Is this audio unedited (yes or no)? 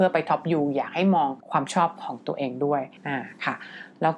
no